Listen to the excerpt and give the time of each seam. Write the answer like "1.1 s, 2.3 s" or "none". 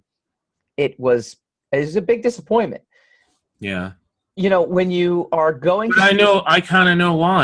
none